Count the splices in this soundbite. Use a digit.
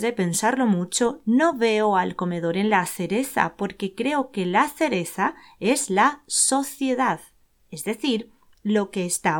0